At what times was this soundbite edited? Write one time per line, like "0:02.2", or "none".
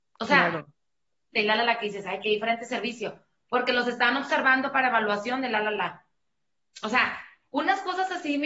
0:01.3
0:06.7

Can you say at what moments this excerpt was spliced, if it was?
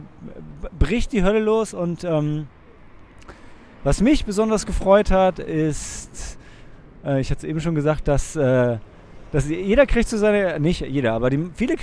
none

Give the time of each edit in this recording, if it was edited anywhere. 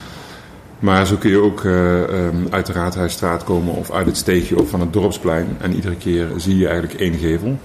0:06.3

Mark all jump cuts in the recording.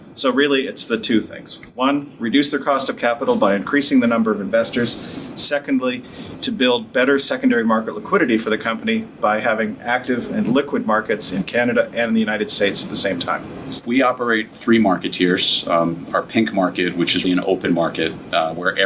0:13.8
0:17.2

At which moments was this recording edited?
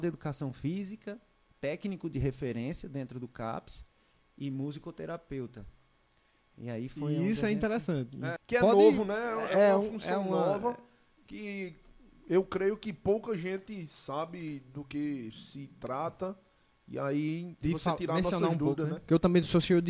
0:08.4
0:17.6

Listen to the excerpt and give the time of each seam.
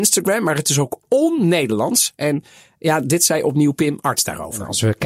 none

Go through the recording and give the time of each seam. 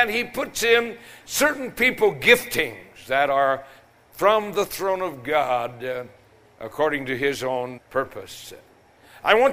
0:07.8

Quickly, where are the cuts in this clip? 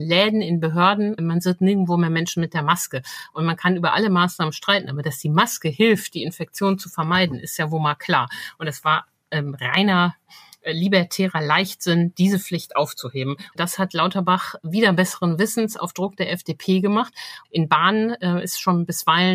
0:13.5
0:17.4

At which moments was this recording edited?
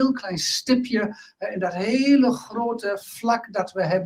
none

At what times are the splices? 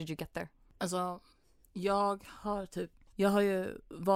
none

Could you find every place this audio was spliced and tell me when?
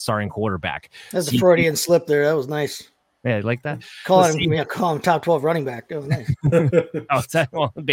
none

